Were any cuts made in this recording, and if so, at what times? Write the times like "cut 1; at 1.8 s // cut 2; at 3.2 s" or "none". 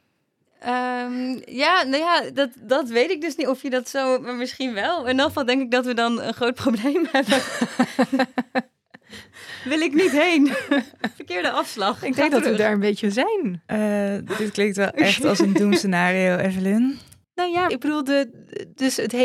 cut 1; at 2.5 s // cut 2; at 17.7 s